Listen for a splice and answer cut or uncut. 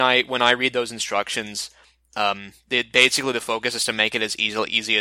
uncut